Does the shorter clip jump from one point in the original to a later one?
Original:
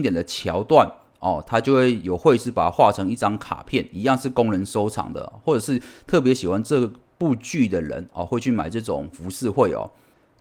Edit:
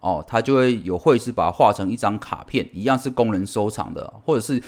no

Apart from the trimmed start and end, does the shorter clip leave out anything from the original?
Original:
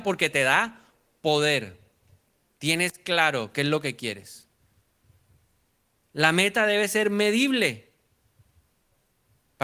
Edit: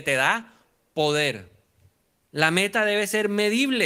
yes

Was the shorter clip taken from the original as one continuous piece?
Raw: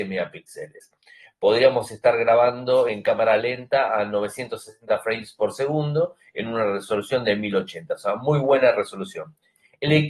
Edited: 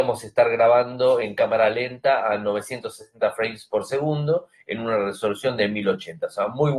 yes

